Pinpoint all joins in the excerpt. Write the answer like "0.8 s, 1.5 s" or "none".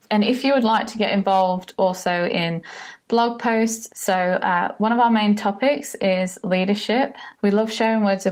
3.9 s, 7.3 s